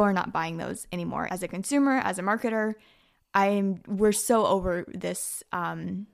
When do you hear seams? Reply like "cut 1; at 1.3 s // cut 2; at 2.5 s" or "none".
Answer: cut 1; at 1.3 s